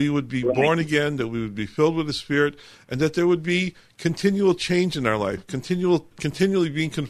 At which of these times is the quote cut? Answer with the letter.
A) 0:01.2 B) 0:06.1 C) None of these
B